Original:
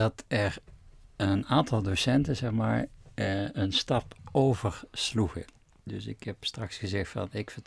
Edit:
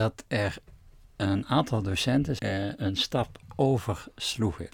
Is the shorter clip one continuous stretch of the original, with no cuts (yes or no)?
no